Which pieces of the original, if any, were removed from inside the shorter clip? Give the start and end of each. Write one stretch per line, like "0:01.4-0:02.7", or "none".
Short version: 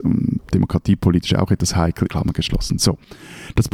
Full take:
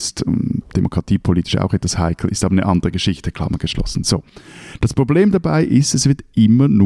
0:02.3-0:03.3